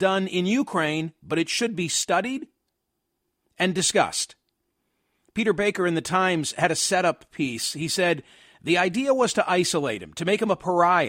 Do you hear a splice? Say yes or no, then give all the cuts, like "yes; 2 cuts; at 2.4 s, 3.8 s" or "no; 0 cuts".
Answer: no; 0 cuts